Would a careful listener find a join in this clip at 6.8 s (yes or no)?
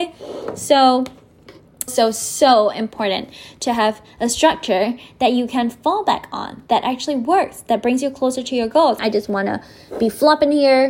no